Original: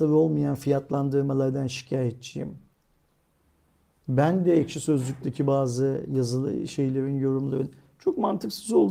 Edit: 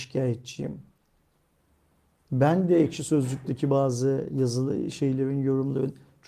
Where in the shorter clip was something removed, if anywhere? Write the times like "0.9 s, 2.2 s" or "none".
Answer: none